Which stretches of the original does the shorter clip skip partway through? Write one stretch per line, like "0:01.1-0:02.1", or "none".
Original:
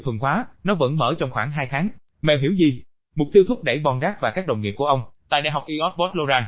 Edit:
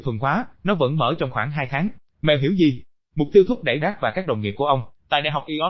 0:03.8-0:04.0